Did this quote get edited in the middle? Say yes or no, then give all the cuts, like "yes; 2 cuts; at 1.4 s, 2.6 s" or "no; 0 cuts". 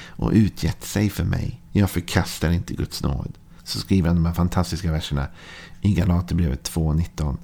yes; 2 cuts; at 1.7 s, 3.6 s